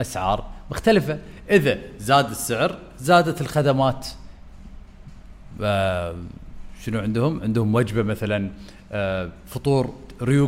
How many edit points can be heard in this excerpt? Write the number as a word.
zero